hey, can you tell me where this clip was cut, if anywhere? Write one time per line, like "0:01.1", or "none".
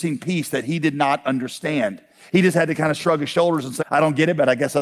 0:03.8

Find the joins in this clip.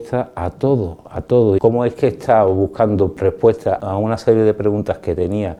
0:01.6

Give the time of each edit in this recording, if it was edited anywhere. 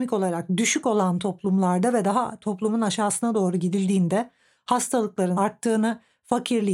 none

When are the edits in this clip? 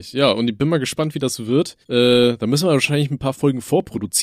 0:01.8

